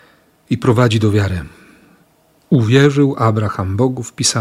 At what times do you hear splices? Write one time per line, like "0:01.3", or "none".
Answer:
none